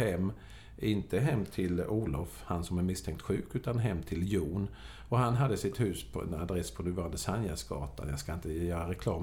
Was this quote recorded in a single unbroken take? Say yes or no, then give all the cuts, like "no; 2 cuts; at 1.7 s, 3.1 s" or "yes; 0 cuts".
yes; 0 cuts